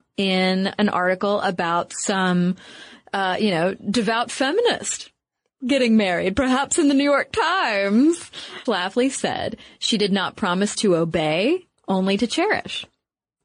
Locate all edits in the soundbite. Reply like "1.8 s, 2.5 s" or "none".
8.6 s, 11.8 s